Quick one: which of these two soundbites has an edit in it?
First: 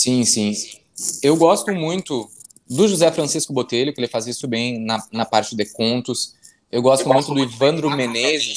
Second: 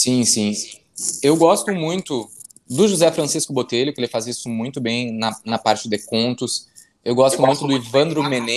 first; 1 cut; at 4.4 s

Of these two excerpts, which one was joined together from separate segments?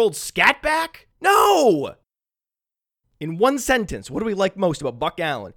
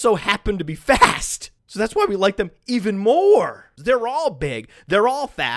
second; 1 cut; at 3.8 s

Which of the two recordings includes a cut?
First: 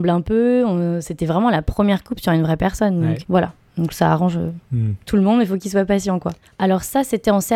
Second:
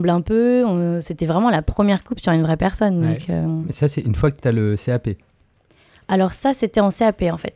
first; 2 cuts; at 3.2 s, 6.4 s

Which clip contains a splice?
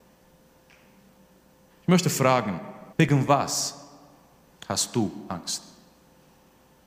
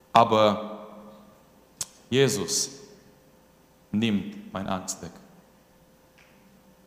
first; 2 cuts; at 1.7 s, 2.9 s

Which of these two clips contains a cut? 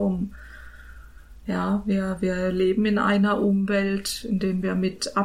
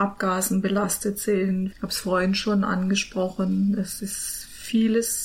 second; 1 cut; at 1.7 s

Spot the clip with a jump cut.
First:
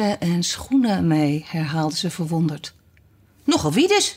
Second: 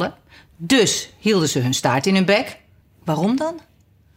second; 1 cut; at 2.8 s

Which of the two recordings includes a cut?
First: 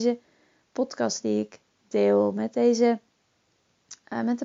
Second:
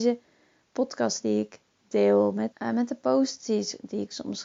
second; 1 cut; at 2.5 s

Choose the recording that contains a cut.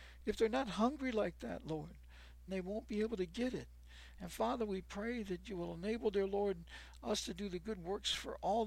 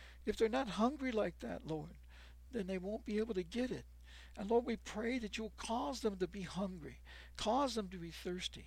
first; 2 cuts; at 2.5 s, 4.2 s

